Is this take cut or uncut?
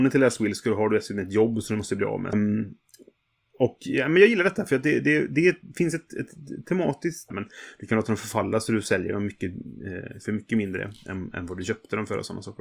cut